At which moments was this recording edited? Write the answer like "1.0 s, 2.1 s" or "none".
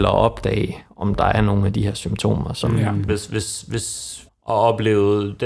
3.1 s, 4.3 s